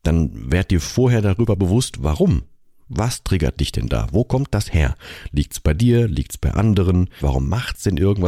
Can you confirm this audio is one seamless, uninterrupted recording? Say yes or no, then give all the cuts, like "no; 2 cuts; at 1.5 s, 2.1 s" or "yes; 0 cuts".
no; 1 cut; at 7.2 s